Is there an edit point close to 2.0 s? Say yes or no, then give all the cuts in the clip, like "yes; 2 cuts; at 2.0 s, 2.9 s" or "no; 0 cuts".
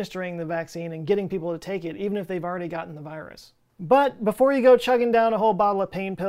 no; 0 cuts